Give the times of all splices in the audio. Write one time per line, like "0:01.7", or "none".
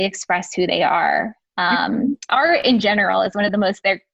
0:02.3